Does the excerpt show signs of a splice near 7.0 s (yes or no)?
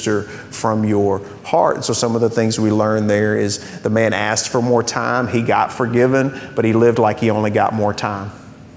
no